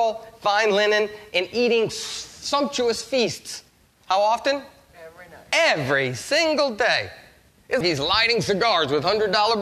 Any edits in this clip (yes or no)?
yes